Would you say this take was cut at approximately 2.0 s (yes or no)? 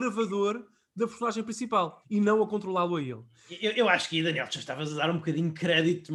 yes